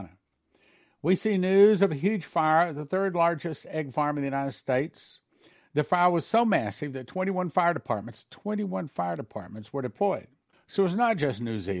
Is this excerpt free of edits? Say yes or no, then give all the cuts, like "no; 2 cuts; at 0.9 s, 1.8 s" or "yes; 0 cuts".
no; 1 cut; at 10.5 s